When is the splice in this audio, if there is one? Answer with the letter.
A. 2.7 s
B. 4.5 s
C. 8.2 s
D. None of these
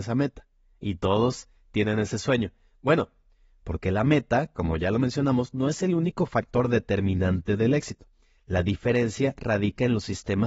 D